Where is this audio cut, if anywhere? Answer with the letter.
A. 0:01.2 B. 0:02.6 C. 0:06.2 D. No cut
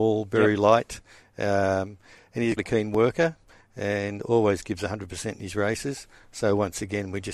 B